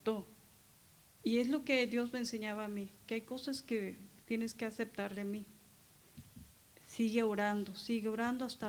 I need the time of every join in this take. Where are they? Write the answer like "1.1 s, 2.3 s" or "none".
none